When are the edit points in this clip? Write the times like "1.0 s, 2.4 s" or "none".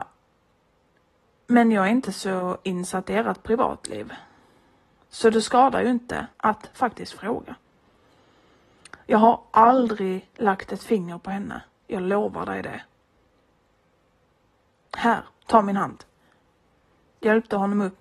6.3 s